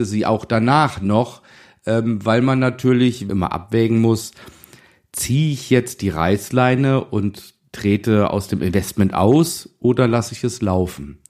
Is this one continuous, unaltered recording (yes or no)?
no